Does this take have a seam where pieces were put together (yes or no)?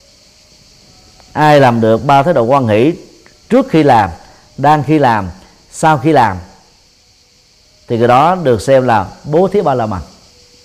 no